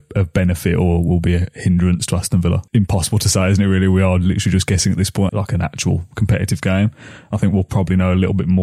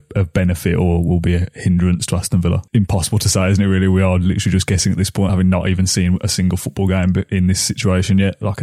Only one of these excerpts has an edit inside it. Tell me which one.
first; 1 cut; at 5.3 s

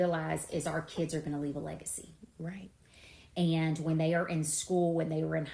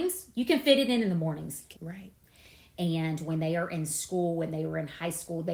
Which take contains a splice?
second; 1 cut; at 1.7 s

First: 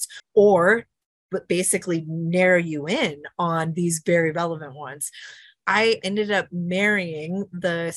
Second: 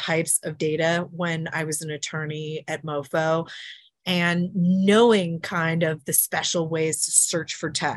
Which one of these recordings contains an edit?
first; 2 cuts; at 4.3 s, 6.0 s

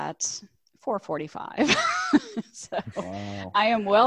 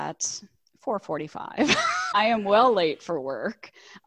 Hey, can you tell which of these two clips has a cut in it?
second; 1 cut; at 2.1 s

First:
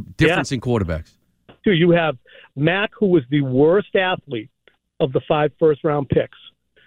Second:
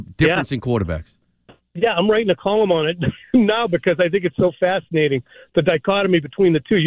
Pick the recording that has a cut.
first; 1 cut; at 1.6 s

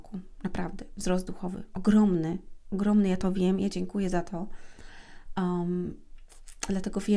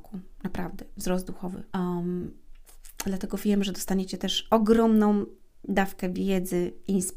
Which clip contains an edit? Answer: second; 1 cut; at 1.7 s

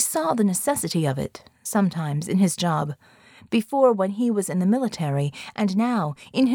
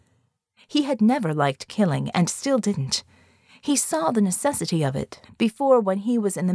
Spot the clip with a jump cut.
second; 1 cut; at 5.2 s

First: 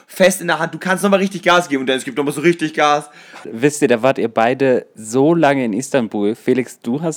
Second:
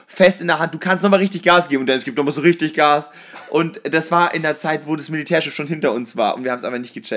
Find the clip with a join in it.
first; 1 cut; at 3.4 s

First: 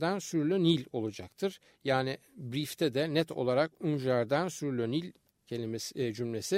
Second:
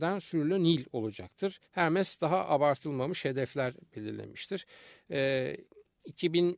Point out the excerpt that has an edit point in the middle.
second; 1 cut; at 1.6 s

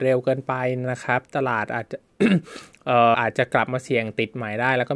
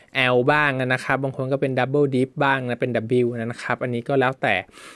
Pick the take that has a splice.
first; 1 cut; at 3.1 s

